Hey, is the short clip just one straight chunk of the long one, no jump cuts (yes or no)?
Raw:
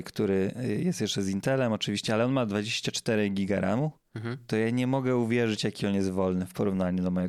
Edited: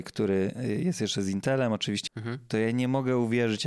no